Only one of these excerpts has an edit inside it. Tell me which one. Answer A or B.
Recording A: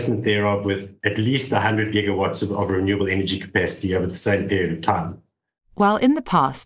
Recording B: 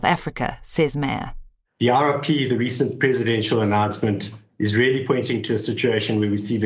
B